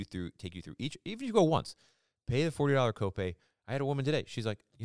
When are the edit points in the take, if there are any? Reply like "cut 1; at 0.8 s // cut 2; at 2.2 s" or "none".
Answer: none